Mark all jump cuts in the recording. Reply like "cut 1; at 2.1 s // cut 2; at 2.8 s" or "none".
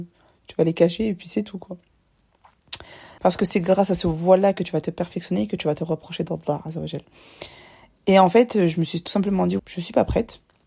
cut 1; at 3.2 s // cut 2; at 9.6 s